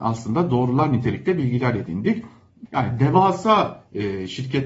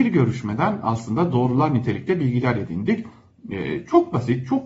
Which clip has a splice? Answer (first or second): first